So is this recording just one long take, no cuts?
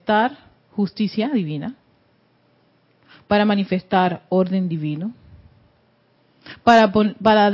yes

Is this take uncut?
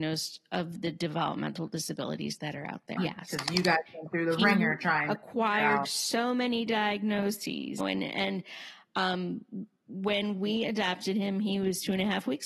no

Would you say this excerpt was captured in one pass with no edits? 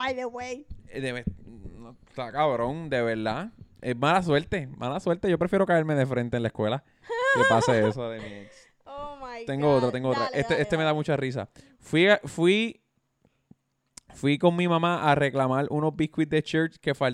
yes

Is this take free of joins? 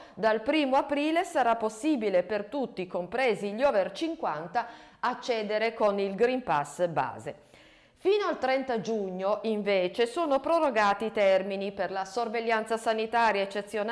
yes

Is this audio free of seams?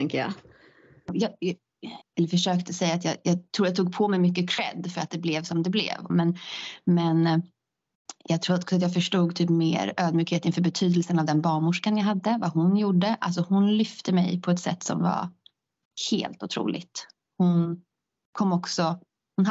no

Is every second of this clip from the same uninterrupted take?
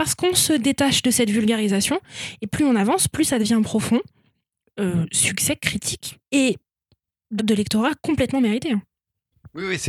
no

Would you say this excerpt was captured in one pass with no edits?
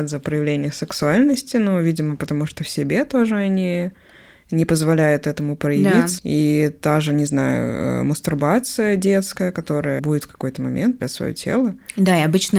no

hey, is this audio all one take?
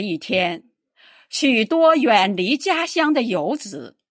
yes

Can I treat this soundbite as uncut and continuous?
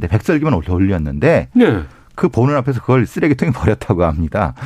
yes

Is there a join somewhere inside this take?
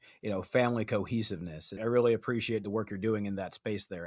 yes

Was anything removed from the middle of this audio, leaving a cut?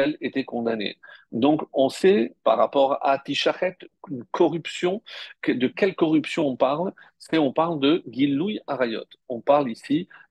no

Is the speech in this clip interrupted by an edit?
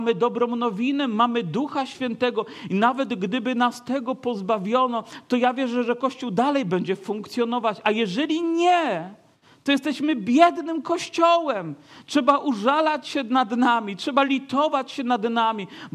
no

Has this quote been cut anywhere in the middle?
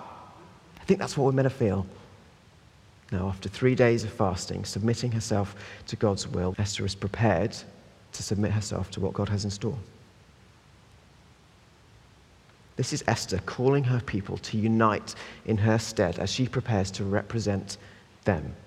yes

